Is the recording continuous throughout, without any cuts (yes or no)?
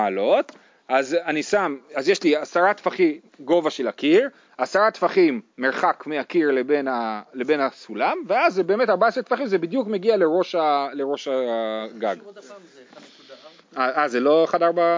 no